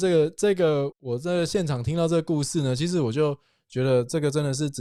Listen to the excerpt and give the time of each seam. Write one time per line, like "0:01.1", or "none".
0:00.9